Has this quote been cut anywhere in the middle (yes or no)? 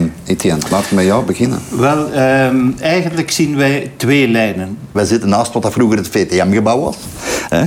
yes